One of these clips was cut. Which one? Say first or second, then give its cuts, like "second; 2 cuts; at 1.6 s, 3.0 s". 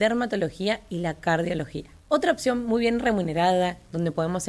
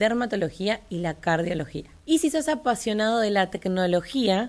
second; 1 cut; at 2.0 s